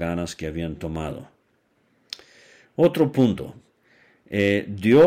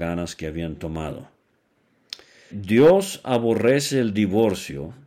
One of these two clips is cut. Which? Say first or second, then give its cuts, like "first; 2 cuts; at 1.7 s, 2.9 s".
second; 1 cut; at 2.5 s